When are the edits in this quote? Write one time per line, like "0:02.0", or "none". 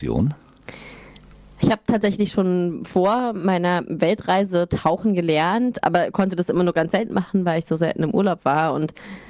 none